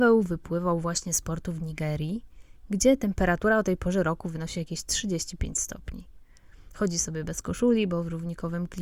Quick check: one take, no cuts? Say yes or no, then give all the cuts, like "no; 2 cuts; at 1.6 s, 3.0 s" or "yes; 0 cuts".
yes; 0 cuts